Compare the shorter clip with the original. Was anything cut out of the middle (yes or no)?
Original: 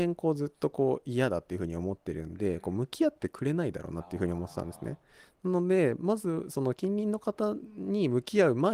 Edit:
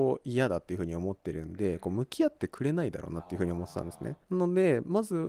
yes